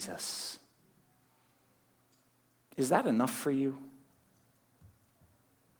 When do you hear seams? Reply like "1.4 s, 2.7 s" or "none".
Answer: none